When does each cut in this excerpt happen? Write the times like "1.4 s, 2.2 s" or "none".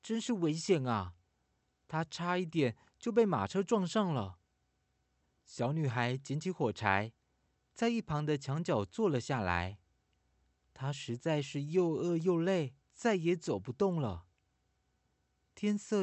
12.8 s